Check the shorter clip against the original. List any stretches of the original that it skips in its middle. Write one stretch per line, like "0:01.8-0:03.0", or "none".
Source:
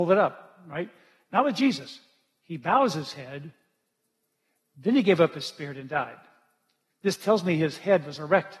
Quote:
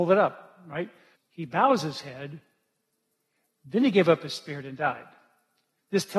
0:01.2-0:02.3